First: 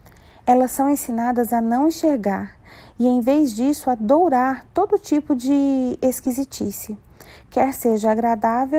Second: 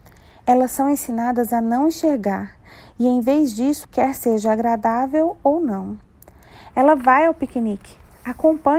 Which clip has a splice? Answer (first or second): second